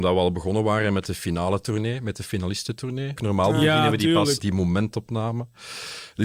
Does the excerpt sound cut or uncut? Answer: cut